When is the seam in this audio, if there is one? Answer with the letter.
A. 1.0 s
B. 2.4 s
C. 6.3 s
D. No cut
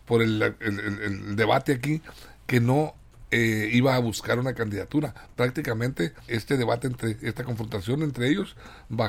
C